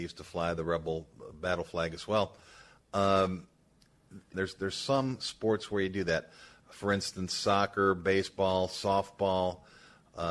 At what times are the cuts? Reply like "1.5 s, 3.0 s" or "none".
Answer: 4.3 s